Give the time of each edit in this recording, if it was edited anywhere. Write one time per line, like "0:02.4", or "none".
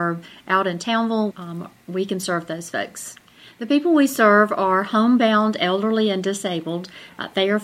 0:01.3